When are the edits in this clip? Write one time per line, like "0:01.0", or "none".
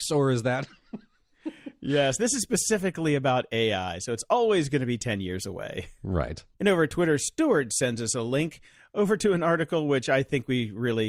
0:06.5